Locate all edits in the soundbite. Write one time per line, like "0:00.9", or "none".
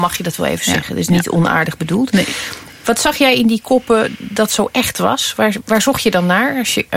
0:05.6